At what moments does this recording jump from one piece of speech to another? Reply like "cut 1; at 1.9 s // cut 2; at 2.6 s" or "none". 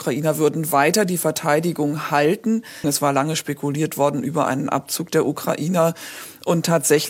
cut 1; at 2.8 s

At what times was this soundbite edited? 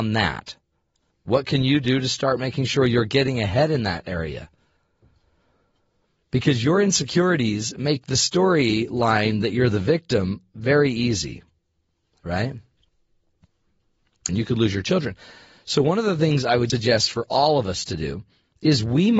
cut 1; at 1.1 s // cut 2; at 14.3 s // cut 3; at 16.7 s

